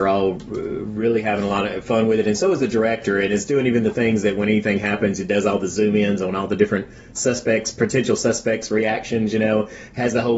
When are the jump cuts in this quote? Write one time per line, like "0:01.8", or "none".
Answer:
none